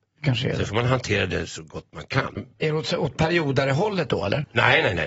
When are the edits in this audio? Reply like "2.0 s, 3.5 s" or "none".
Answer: 2.4 s